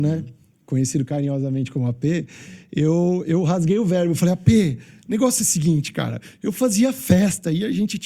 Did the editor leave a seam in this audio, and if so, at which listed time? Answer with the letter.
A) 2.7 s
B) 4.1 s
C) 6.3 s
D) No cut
D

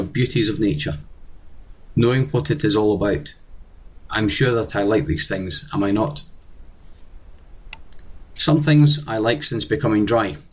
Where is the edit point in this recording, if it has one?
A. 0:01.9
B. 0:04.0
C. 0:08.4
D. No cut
C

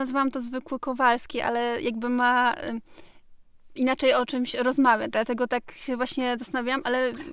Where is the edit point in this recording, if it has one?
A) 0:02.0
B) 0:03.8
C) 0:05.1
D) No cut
B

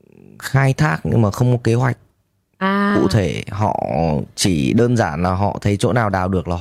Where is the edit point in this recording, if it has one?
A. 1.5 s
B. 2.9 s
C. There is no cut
C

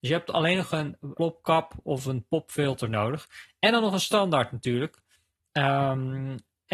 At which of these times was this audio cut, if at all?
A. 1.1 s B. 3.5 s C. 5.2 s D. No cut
A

